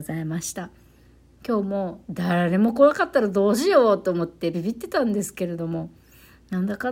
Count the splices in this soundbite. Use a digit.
1